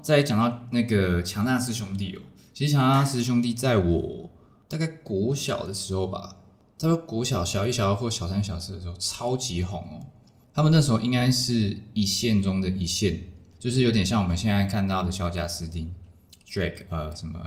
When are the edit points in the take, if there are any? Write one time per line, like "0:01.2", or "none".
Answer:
none